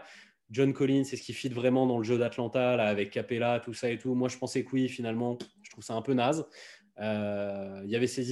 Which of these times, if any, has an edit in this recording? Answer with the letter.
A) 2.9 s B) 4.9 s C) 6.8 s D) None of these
D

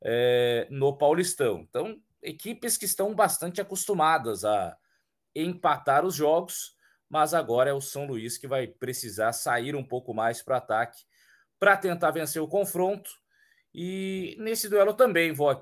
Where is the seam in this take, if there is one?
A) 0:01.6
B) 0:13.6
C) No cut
C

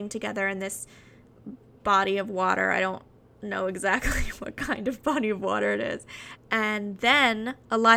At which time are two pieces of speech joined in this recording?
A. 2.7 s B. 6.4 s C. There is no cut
B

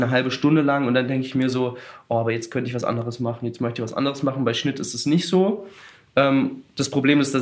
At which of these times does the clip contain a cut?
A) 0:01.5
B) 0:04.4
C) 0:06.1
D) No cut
D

